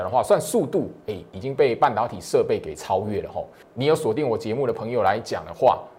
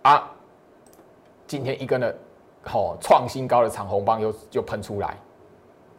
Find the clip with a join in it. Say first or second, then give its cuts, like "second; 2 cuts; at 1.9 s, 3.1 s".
first; 1 cut; at 3.6 s